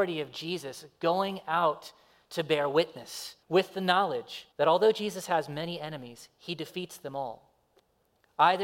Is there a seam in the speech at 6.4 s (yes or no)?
no